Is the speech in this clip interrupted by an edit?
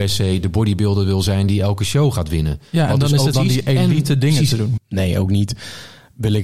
yes; 2 cuts; at 3.3 s, 4.8 s

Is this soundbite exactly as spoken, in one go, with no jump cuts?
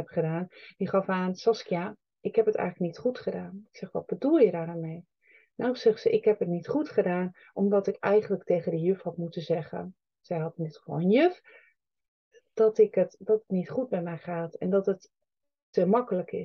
yes; 0 cuts

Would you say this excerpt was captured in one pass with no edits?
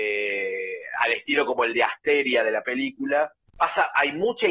no; 1 cut; at 3.5 s

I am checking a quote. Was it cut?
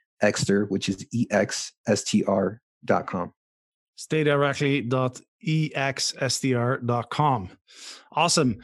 no; 0 cuts

